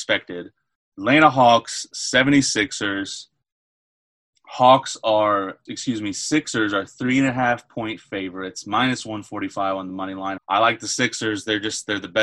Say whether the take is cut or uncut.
cut